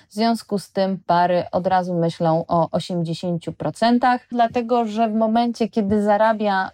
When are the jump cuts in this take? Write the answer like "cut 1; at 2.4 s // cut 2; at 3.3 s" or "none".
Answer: cut 1; at 4.3 s